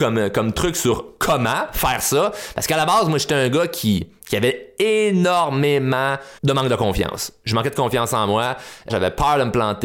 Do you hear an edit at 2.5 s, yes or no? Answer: no